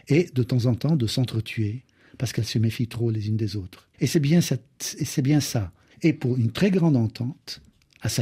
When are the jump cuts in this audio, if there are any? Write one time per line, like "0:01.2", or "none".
0:03.9
0:05.9